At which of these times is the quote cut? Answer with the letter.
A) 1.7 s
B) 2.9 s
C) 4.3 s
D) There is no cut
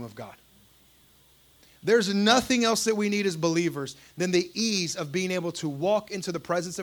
D